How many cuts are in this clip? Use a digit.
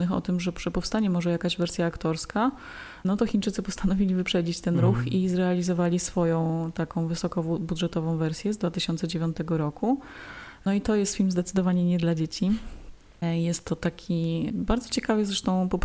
0